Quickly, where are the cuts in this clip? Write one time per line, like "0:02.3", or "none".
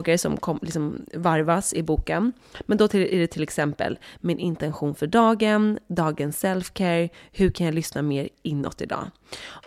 none